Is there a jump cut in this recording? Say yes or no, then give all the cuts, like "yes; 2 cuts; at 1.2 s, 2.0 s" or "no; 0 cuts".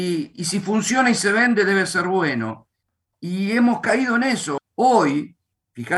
yes; 1 cut; at 4.6 s